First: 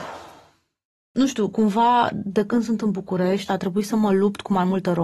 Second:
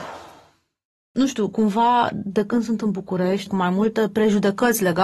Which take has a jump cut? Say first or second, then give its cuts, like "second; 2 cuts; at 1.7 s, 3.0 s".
second; 1 cut; at 3.5 s